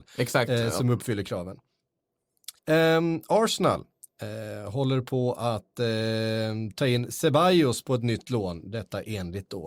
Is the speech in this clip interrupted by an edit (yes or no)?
yes